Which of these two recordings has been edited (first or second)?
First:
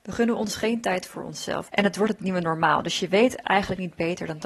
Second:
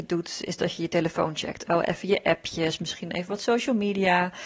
first